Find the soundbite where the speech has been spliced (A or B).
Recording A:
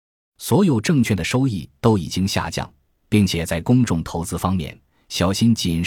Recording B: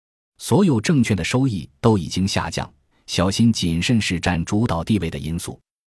B